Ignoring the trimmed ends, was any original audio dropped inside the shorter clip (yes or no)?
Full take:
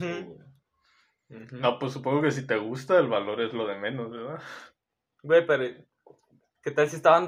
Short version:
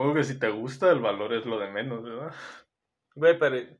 no